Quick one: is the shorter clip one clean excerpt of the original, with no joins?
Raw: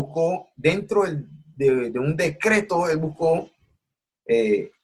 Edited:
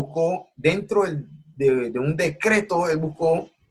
yes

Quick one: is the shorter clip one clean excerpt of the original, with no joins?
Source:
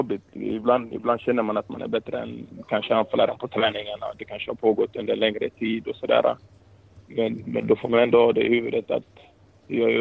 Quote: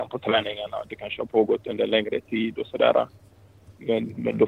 yes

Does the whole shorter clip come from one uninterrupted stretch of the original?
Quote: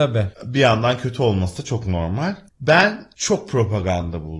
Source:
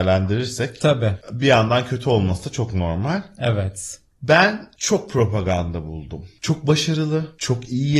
no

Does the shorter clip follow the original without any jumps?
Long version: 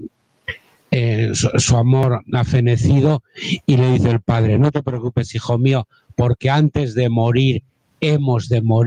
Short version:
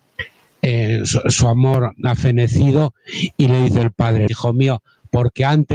no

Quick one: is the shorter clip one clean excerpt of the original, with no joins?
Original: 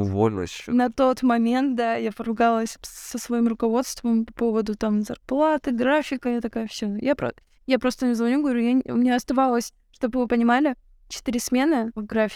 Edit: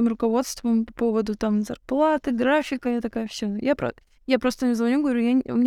yes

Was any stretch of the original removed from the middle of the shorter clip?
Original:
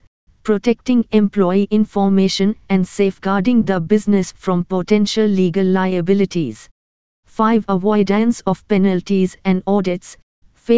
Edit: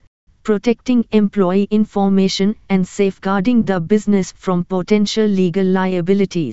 no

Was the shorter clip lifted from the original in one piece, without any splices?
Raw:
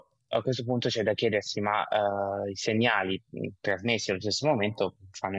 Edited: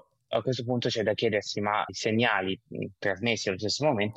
no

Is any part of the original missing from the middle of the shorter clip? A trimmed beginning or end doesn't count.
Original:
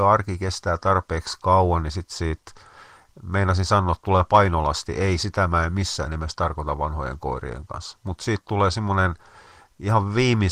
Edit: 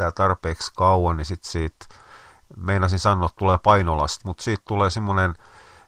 yes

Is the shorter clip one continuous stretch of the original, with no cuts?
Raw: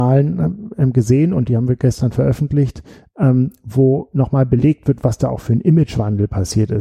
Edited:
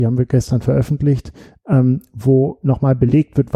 yes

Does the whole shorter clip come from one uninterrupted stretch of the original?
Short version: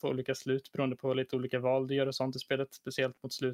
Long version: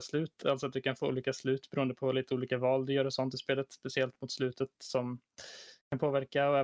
yes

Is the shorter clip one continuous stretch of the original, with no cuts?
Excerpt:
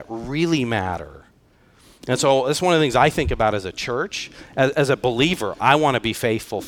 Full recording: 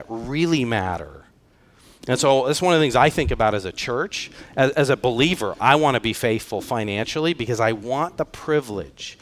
yes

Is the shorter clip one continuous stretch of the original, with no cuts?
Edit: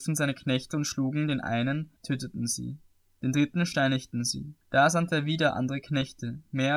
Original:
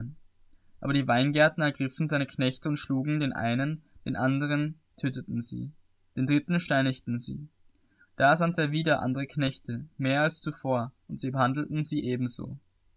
no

